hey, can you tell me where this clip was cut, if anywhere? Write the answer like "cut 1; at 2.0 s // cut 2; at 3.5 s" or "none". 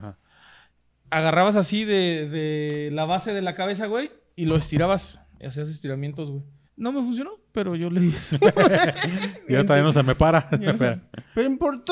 cut 1; at 1.0 s // cut 2; at 6.7 s